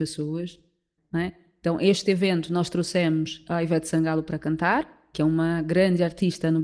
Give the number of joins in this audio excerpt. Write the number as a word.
one